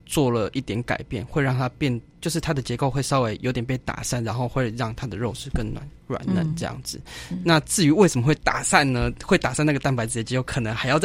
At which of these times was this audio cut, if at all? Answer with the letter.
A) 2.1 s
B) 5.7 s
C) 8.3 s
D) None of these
C